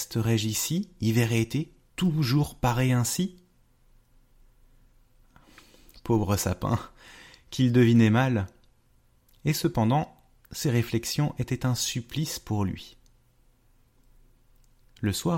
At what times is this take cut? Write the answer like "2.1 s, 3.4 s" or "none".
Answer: none